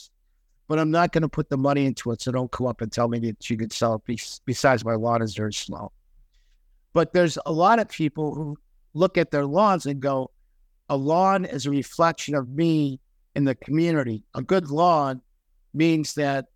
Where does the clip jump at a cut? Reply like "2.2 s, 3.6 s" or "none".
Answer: none